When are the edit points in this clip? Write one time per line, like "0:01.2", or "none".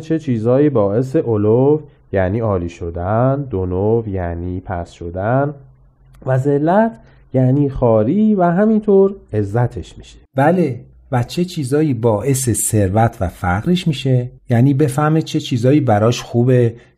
0:10.3
0:14.4